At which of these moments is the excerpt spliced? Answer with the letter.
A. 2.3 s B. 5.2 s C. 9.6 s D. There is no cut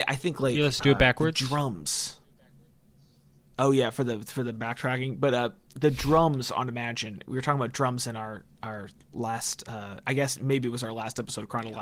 D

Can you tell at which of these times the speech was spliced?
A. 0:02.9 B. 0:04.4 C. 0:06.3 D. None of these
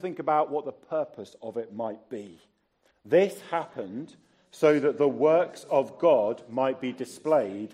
A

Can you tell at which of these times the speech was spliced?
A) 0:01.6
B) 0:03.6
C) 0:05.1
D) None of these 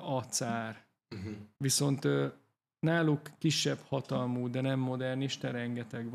A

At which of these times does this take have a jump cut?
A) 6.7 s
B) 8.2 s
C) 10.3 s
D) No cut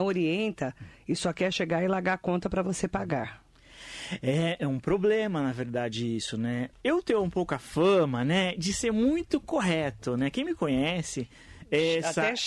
A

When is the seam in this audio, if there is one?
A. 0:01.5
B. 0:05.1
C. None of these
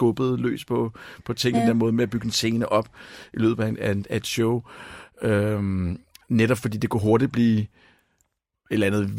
A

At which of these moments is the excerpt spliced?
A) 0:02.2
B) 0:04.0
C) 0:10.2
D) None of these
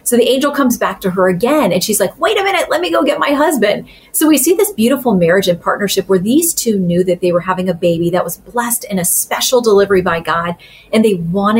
D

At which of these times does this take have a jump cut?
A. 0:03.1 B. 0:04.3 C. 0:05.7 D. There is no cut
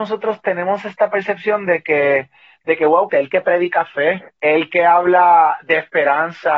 A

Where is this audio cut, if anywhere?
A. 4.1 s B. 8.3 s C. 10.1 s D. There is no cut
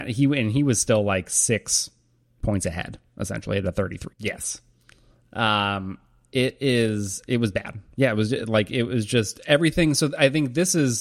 A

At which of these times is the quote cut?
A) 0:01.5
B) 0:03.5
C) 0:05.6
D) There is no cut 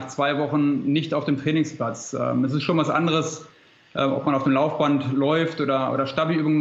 D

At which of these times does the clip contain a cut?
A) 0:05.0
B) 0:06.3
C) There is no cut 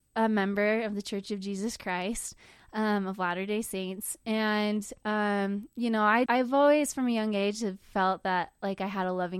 B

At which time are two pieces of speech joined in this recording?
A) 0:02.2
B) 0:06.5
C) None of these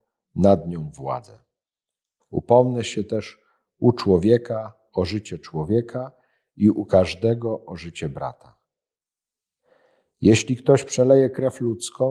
A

